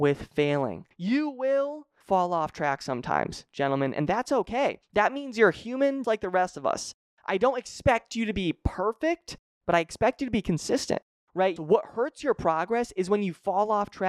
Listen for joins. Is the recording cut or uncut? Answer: cut